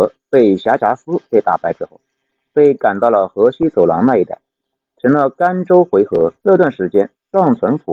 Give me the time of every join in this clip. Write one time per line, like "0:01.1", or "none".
0:06.4